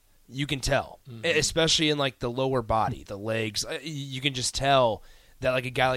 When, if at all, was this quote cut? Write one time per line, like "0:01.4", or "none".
0:03.1